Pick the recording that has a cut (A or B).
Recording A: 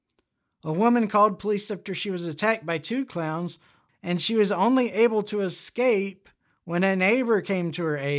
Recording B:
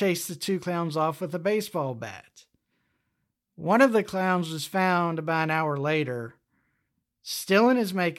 A